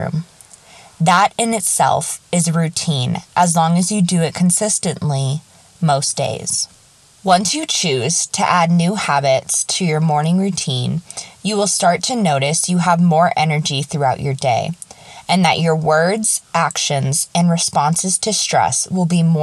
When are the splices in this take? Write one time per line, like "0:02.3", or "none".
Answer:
none